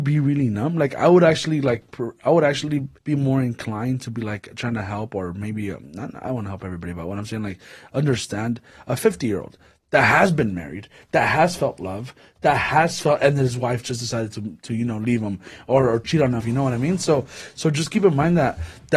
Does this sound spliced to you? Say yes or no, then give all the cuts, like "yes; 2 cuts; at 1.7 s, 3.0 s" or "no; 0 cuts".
yes; 2 cuts; at 3.0 s, 16.4 s